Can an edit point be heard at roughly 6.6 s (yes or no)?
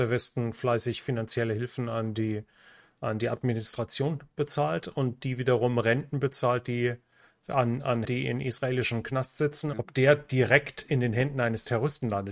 no